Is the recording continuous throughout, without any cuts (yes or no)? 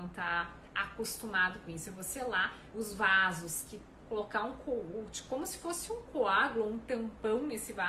no